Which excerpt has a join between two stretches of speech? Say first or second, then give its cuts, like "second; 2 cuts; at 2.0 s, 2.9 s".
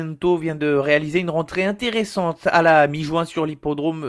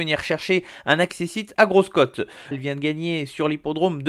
second; 1 cut; at 2.5 s